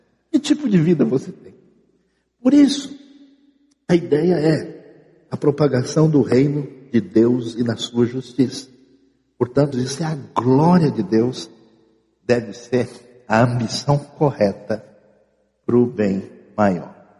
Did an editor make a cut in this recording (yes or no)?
yes